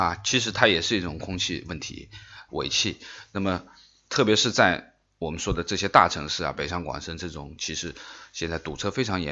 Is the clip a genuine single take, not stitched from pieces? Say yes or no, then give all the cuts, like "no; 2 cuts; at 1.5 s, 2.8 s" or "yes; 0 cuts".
no; 1 cut; at 2.5 s